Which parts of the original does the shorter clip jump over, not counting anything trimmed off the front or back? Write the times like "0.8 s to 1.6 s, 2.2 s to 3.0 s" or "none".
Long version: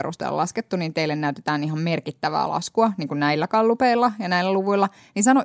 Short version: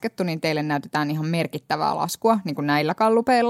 none